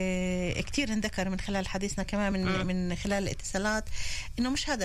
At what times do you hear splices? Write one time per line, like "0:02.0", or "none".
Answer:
none